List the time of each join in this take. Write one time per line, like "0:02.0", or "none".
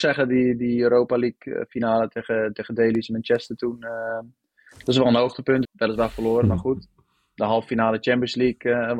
0:05.6